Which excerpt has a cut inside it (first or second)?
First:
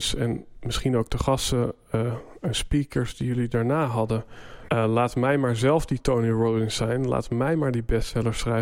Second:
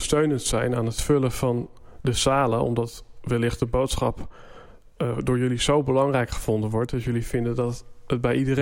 first